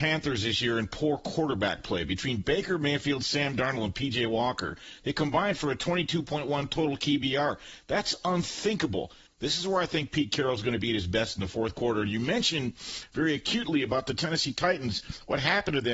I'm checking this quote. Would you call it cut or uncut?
cut